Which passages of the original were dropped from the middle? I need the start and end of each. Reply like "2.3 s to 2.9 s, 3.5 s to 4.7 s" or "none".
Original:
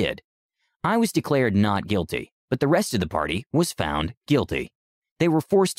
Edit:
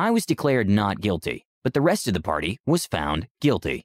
none